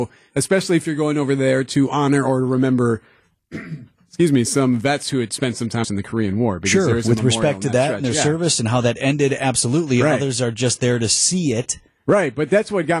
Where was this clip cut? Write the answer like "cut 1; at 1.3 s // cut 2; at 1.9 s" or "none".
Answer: cut 1; at 5.8 s